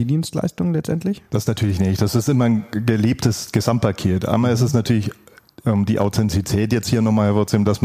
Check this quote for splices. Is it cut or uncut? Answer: uncut